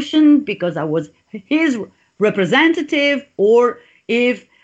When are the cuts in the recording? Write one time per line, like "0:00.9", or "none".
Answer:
none

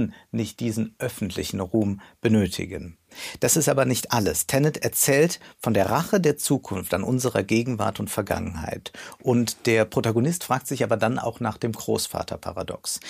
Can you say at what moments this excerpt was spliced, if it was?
none

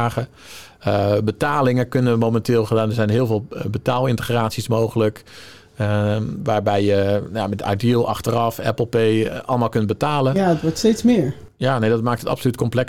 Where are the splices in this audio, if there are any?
0:11.5

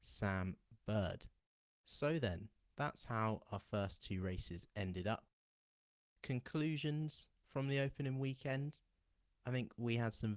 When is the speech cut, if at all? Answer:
none

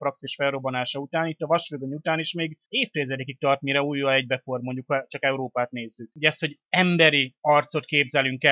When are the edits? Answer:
0:06.1

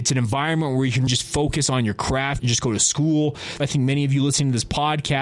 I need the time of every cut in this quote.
0:01.1
0:02.4
0:03.6

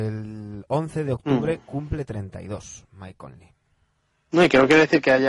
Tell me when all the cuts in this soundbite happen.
none

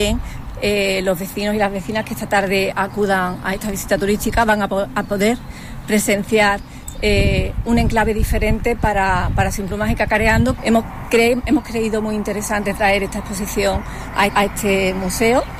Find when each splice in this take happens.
0:10.6
0:14.3

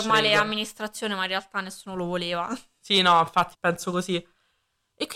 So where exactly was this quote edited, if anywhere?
0:03.5

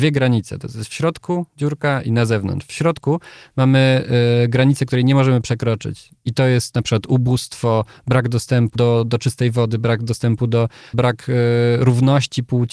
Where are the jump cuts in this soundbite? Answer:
0:08.8
0:10.9

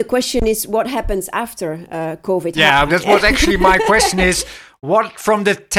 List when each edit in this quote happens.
0:02.9

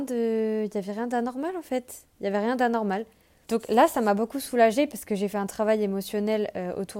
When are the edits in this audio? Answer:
0:03.4

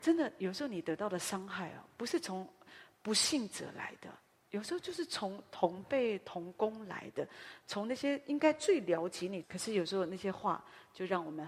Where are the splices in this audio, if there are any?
0:09.4

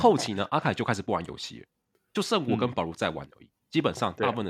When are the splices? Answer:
none

